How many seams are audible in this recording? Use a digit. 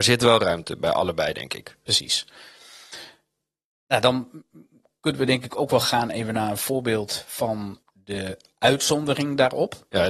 1